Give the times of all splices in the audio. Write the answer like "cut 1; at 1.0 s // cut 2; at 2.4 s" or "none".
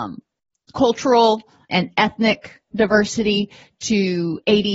cut 1; at 1.7 s